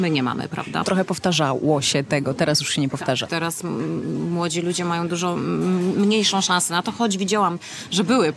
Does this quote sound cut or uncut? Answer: cut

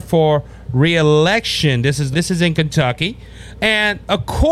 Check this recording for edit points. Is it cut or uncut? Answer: cut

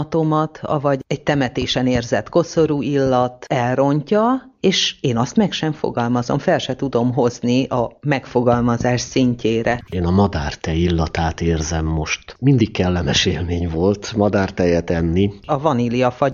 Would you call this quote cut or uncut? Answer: uncut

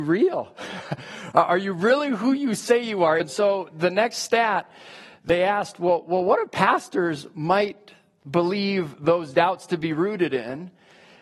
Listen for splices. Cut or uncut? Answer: cut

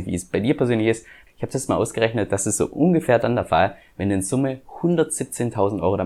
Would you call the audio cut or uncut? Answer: cut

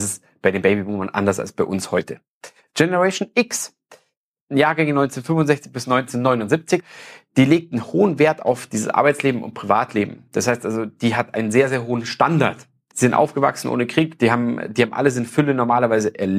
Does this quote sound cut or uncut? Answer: cut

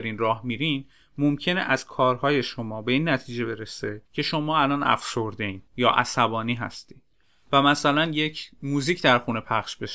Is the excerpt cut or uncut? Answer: cut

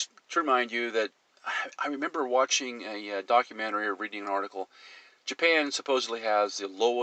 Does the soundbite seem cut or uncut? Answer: uncut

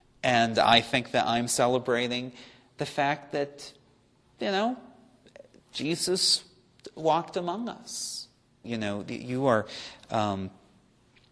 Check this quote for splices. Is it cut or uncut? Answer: cut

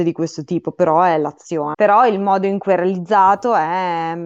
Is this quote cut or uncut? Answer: cut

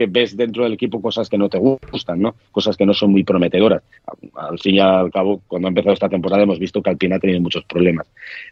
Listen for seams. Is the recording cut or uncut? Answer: uncut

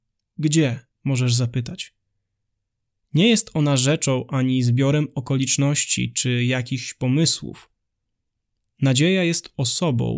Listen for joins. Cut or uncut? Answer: uncut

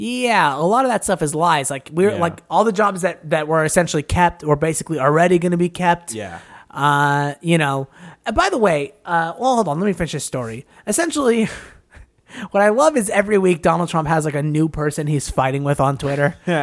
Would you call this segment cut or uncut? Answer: uncut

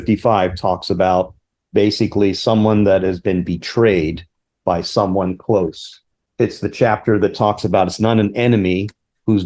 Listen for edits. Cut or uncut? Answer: uncut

